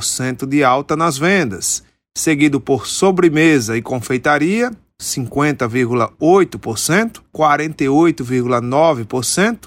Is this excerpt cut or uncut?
cut